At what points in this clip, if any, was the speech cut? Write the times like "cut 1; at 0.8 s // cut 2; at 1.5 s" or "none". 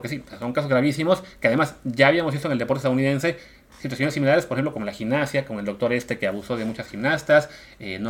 none